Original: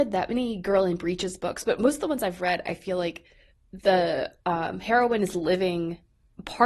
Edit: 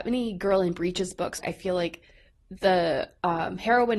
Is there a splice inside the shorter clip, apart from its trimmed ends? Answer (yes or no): yes